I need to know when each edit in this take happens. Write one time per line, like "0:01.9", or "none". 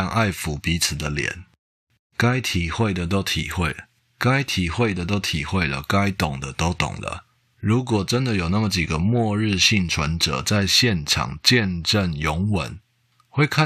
0:02.0
0:07.5